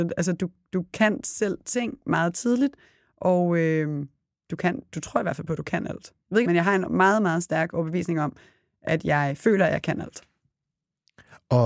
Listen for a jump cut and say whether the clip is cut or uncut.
cut